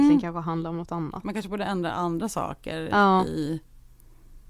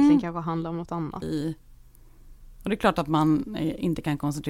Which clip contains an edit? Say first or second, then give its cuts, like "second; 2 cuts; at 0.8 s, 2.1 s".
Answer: second; 1 cut; at 1.2 s